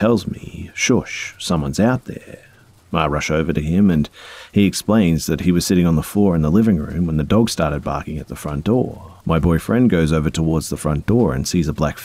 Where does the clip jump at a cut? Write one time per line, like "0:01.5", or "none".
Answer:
0:02.8
0:09.2